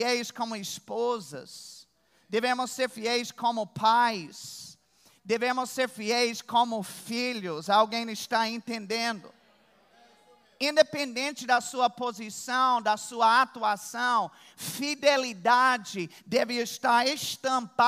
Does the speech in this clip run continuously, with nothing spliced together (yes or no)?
yes